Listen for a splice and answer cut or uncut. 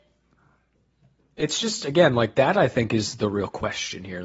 uncut